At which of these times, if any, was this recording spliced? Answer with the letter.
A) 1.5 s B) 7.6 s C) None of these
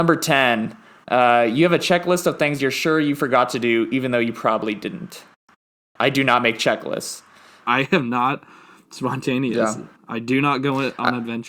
B